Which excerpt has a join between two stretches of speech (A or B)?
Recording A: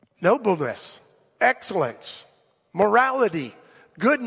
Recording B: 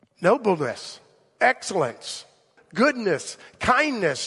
B